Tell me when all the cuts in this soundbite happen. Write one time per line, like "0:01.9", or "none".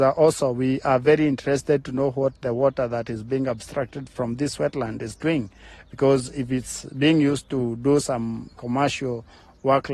none